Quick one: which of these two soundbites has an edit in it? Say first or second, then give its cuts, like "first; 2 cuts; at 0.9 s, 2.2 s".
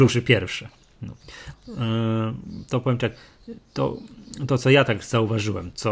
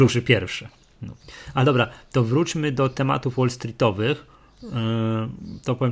first; 1 cut; at 1.5 s